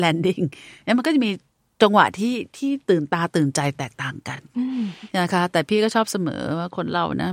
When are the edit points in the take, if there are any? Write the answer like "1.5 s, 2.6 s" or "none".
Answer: none